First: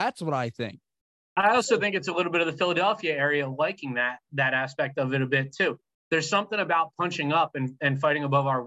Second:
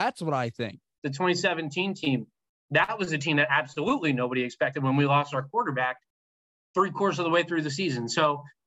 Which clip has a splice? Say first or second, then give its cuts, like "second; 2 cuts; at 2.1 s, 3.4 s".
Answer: second; 1 cut; at 1.0 s